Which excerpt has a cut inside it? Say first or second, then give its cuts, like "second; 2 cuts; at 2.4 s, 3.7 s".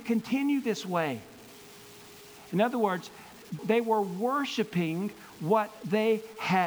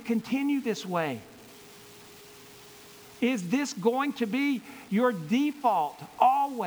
first; 2 cuts; at 2.4 s, 3.6 s